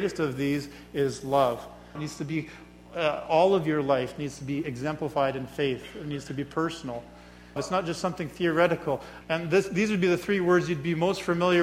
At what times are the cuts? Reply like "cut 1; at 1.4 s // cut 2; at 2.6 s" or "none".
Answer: cut 1; at 2.0 s // cut 2; at 7.6 s // cut 3; at 9.2 s